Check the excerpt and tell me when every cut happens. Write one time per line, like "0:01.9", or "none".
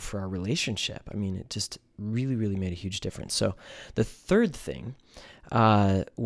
none